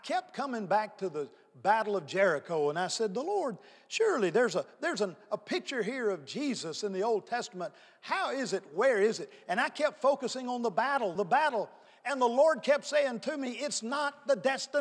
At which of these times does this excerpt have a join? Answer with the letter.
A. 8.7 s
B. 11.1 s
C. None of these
B